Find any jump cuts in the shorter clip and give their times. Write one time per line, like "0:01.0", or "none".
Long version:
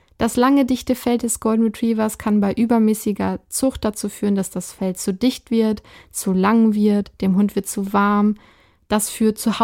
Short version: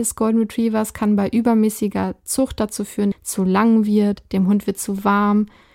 0:03.1